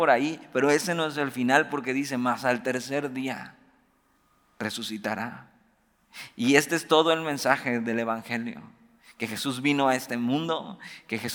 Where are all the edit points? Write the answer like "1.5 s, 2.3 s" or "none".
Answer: none